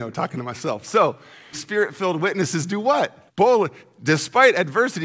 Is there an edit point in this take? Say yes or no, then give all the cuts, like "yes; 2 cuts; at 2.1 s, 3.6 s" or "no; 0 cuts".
yes; 2 cuts; at 1.5 s, 3.3 s